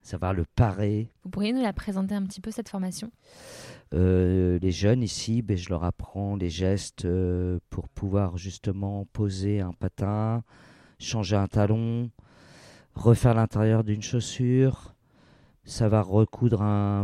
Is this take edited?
yes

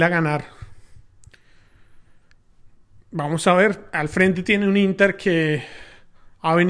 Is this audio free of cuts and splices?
yes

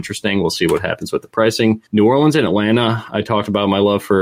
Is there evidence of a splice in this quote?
yes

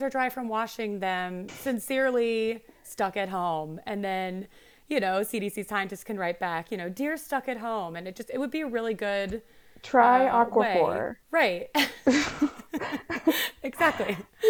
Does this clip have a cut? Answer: yes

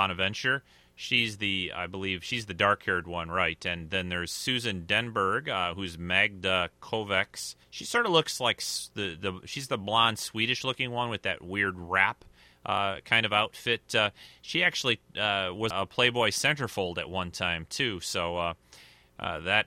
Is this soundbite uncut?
no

